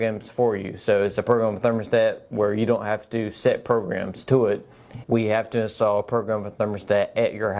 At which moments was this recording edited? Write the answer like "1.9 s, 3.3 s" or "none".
5.0 s